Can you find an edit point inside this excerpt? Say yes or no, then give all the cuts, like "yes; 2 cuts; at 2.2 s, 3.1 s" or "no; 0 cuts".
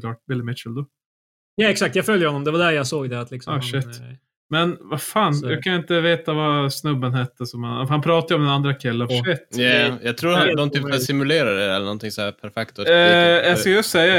yes; 1 cut; at 9.1 s